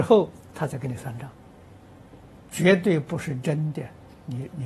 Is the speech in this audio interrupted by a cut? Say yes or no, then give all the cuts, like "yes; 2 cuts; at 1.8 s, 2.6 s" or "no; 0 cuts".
yes; 1 cut; at 2.5 s